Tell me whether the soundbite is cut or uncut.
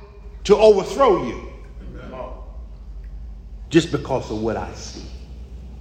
cut